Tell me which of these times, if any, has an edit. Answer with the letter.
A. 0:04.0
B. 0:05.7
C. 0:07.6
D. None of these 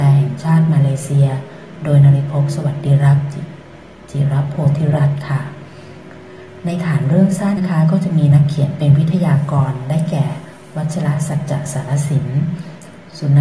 C